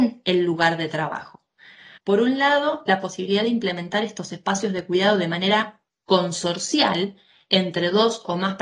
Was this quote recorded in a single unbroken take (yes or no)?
no